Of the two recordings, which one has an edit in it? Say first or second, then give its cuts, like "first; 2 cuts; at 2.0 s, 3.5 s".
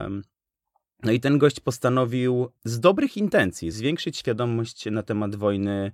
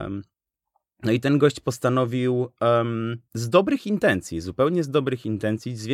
first; 2 cuts; at 2.6 s, 3.7 s